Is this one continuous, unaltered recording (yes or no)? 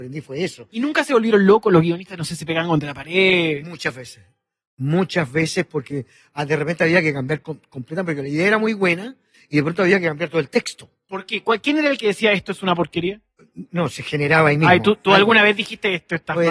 yes